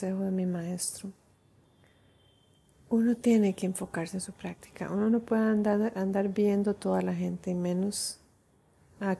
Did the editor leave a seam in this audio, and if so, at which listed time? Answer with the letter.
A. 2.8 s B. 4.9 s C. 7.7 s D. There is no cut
D